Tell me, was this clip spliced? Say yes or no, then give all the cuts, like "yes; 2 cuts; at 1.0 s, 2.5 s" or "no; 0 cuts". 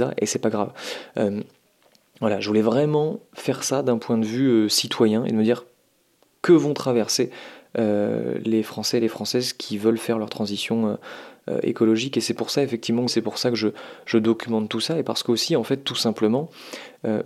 yes; 1 cut; at 13.1 s